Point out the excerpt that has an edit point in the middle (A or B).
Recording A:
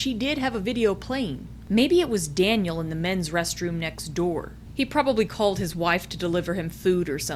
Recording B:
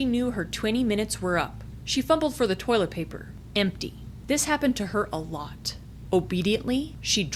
B